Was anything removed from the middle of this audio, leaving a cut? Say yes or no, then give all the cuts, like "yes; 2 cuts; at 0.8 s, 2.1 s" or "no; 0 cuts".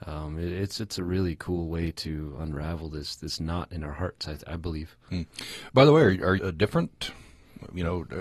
yes; 1 cut; at 6.4 s